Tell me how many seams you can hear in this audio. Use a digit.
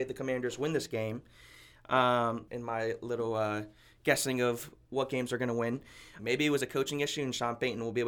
2